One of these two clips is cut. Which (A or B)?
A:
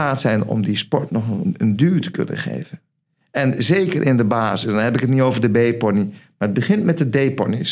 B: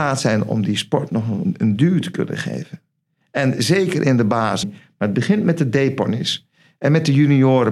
B